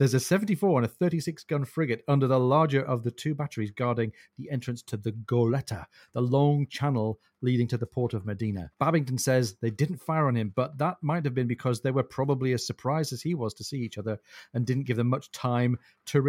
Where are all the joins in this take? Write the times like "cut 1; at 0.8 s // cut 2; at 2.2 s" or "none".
cut 1; at 8.7 s